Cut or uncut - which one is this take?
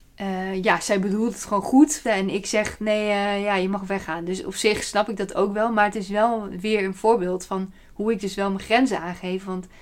cut